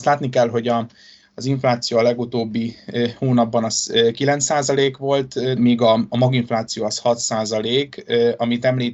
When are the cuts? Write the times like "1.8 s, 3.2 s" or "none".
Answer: 5.6 s